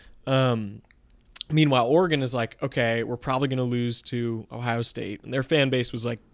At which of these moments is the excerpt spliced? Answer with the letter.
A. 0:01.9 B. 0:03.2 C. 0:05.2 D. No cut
C